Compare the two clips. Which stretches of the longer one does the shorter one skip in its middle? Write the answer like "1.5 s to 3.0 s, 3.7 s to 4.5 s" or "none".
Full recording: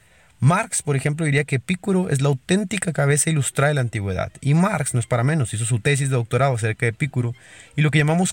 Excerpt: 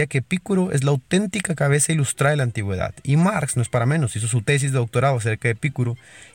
none